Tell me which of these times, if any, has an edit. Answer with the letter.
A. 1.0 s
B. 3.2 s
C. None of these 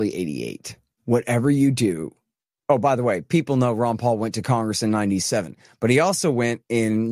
A